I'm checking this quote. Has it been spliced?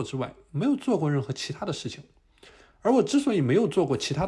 no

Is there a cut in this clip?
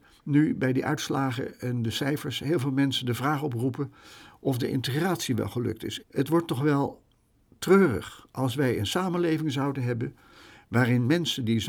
yes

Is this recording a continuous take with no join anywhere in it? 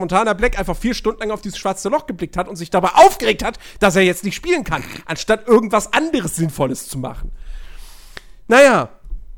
yes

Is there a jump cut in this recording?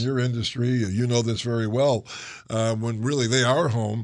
no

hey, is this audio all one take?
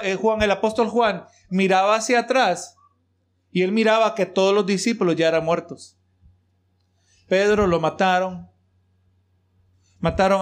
yes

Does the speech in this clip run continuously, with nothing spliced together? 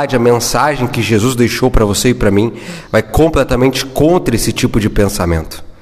yes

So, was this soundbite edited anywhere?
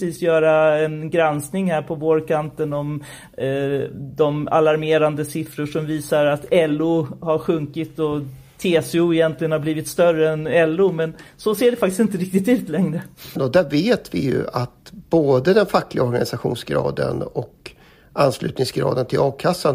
yes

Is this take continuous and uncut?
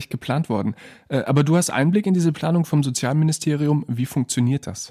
yes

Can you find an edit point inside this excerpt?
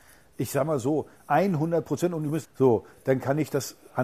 yes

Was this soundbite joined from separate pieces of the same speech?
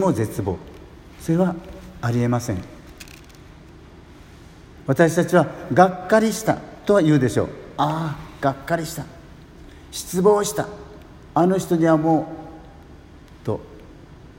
no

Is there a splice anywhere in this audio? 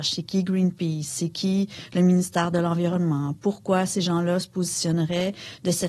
no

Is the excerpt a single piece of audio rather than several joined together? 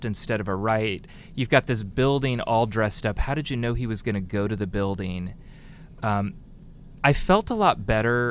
yes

